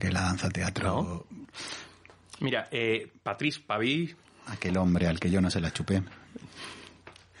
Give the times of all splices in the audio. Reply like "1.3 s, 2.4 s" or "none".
1.4 s